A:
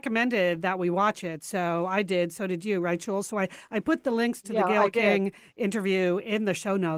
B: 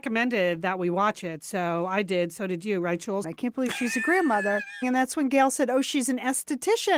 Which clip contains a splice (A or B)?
B